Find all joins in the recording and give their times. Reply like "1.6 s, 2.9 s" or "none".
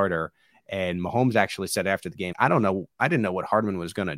2.3 s